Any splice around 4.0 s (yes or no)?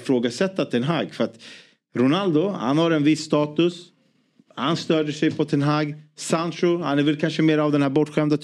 no